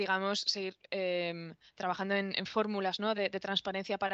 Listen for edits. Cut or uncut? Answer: uncut